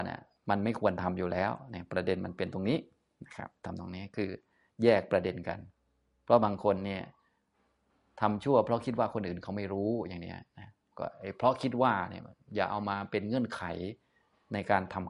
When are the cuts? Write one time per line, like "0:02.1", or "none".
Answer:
none